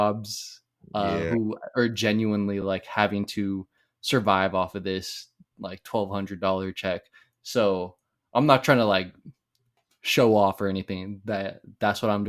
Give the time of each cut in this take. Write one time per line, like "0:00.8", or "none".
none